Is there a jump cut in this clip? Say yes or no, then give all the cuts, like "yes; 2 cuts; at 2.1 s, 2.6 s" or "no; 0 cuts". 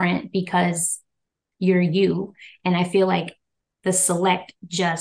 no; 0 cuts